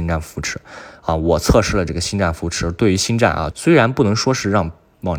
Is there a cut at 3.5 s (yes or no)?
yes